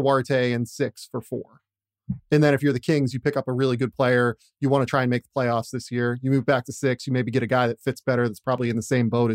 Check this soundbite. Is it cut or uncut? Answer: uncut